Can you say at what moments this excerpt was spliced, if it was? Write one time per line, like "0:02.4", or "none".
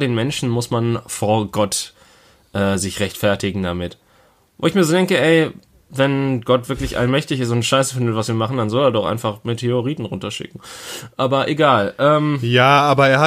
none